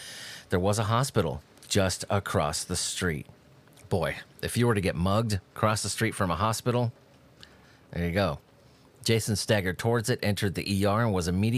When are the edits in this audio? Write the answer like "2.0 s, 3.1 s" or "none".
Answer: none